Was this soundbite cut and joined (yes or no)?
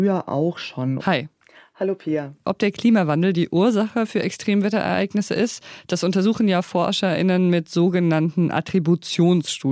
yes